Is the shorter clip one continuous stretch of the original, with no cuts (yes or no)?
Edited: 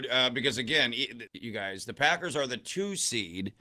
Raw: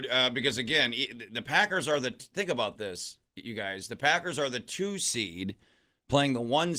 no